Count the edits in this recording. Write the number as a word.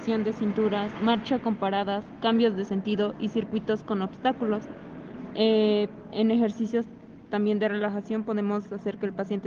zero